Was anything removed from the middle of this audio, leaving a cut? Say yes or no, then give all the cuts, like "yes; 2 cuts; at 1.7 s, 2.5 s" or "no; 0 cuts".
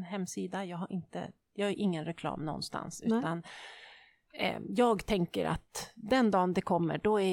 no; 0 cuts